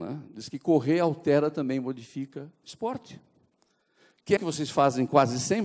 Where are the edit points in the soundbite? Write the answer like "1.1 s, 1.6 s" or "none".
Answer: 2.6 s, 4.4 s

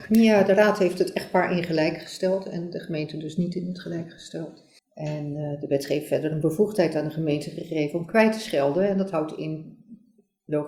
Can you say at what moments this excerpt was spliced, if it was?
4.8 s

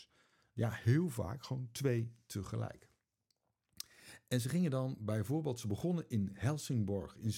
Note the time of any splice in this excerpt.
none

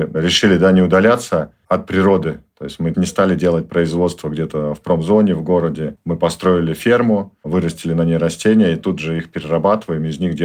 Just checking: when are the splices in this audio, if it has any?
none

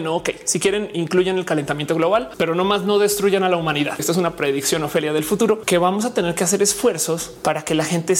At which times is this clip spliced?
4.0 s

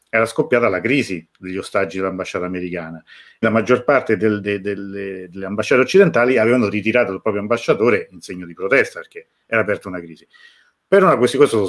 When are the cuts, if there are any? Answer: 3.4 s

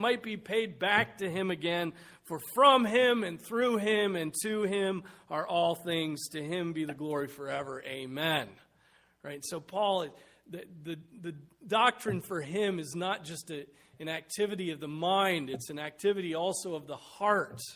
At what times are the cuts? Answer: none

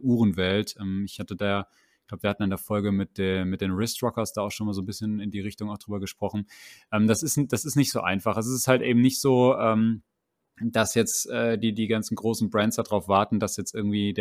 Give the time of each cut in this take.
none

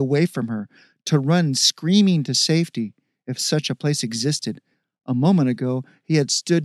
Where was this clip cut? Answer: none

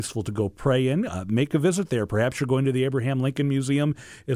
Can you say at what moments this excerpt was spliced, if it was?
none

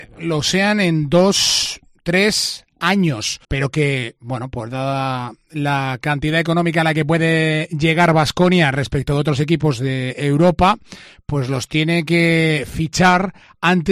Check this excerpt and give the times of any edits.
3.4 s

